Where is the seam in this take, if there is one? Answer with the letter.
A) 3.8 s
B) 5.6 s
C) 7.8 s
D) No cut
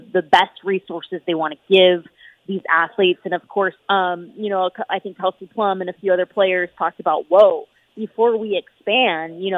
A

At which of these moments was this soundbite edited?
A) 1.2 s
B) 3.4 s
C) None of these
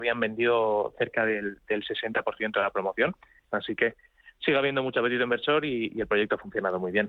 B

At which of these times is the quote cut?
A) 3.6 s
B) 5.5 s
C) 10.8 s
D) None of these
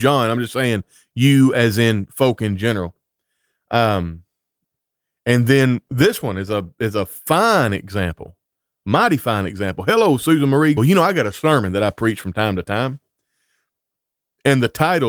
C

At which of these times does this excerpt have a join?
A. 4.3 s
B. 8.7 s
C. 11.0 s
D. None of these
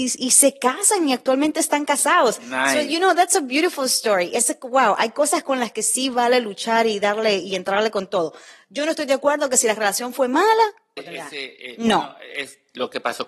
C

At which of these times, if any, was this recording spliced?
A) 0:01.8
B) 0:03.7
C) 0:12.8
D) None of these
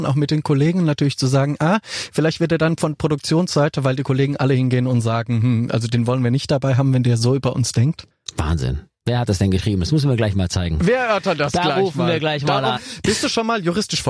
C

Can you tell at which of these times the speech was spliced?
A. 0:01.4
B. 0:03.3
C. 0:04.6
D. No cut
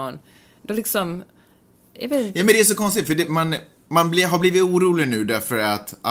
B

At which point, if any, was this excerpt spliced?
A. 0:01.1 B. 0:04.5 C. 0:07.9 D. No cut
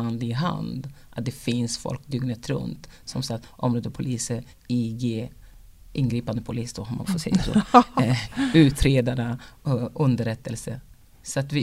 B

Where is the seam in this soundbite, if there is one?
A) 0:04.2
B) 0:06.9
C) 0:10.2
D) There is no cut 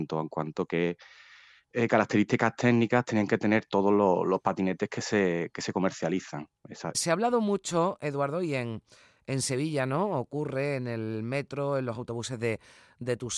B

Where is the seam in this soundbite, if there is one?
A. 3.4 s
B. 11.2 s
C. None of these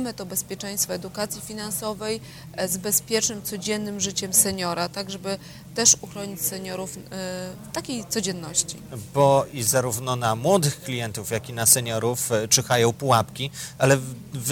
C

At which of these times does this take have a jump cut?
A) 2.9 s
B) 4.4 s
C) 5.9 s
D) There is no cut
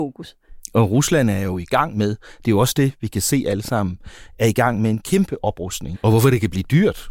C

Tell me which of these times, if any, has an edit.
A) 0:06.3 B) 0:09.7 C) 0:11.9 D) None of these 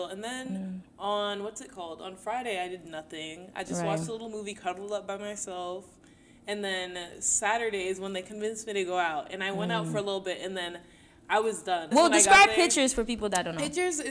C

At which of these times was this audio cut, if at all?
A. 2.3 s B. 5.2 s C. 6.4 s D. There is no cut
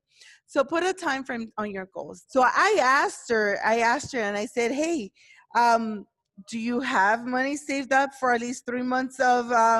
A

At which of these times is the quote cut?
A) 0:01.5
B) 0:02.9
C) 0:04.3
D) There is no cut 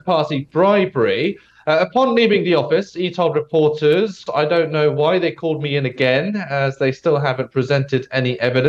C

